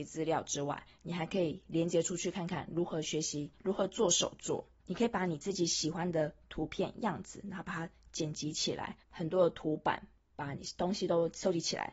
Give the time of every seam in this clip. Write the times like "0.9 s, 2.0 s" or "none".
4.8 s, 9.0 s

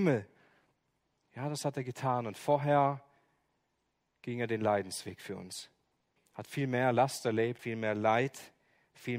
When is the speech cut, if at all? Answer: 6.2 s, 7.6 s

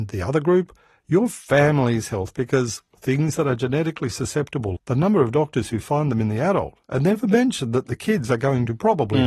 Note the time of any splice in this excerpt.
4.8 s

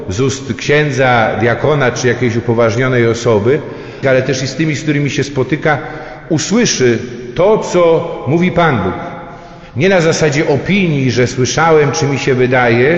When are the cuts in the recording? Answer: 4.0 s

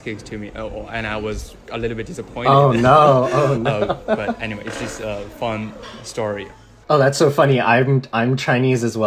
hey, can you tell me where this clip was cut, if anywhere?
6.8 s

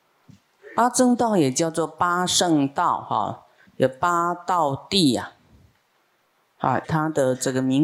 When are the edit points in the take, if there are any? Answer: 6.8 s

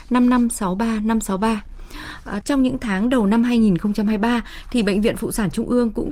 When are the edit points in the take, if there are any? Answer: 2.4 s

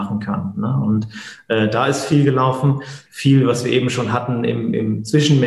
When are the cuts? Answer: 3.1 s

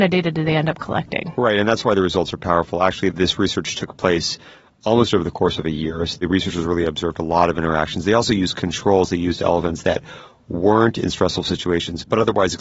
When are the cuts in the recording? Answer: none

